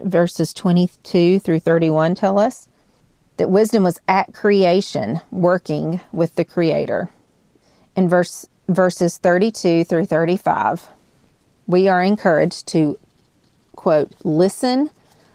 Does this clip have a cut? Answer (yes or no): no